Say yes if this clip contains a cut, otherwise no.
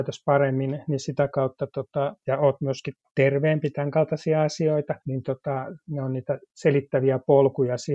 yes